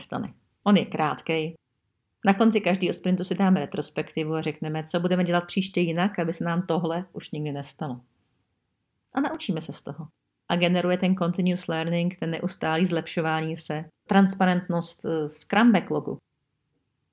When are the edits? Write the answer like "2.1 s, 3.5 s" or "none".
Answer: 10.4 s, 14.1 s

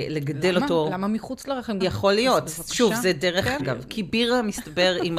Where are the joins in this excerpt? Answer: 1.8 s, 3.6 s

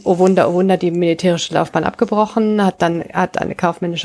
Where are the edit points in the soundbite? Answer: none

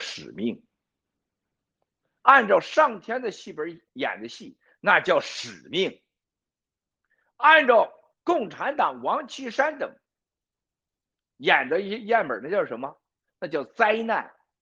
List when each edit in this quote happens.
none

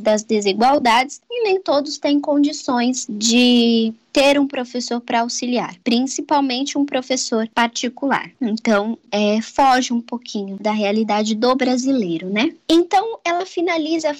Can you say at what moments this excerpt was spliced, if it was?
10.6 s

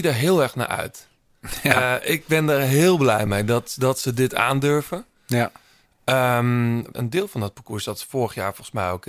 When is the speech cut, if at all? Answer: 6.9 s

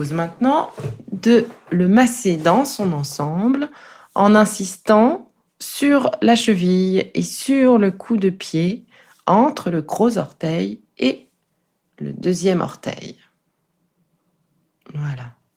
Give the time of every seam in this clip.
none

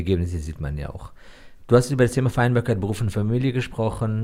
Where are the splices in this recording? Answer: none

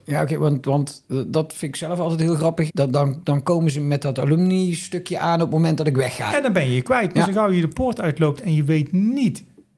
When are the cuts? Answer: 2.7 s, 6.3 s

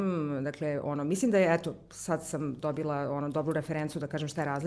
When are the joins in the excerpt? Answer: none

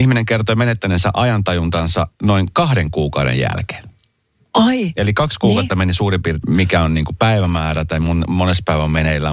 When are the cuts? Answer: 6.4 s

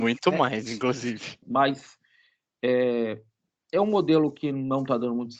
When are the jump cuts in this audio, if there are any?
1.4 s

